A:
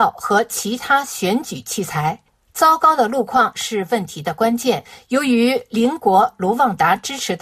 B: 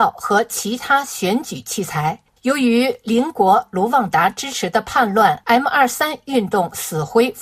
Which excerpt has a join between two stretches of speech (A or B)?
B